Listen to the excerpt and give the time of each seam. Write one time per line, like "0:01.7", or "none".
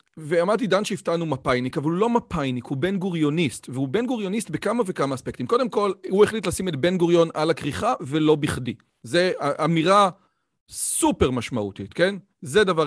none

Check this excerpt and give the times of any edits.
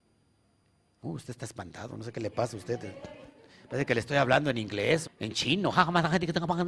0:05.1

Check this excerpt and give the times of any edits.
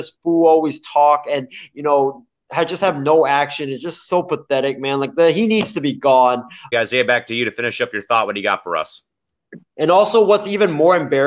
0:06.7

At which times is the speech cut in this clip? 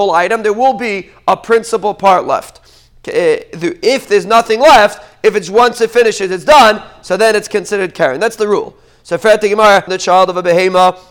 0:09.9

